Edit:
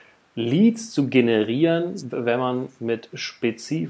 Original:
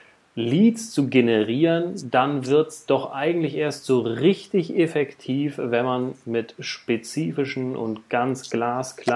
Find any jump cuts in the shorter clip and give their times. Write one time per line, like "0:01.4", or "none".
0:02.1